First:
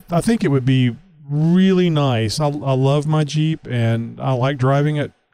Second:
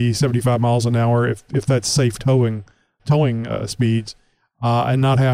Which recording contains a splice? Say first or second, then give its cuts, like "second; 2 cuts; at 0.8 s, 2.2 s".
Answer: second; 1 cut; at 3.0 s